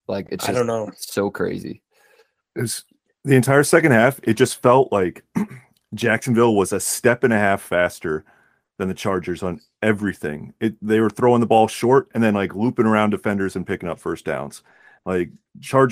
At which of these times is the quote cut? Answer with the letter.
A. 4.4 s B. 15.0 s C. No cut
C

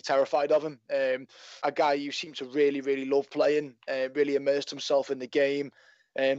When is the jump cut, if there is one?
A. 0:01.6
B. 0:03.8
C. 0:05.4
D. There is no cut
A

